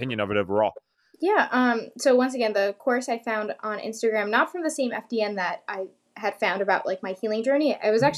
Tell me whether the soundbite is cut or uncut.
uncut